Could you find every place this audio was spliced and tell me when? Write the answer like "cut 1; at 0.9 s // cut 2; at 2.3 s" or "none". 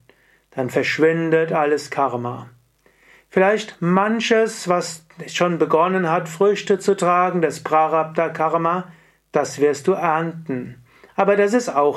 none